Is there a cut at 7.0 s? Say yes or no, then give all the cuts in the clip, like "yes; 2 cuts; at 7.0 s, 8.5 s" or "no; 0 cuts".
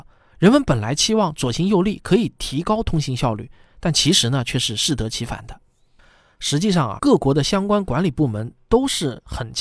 yes; 1 cut; at 7.0 s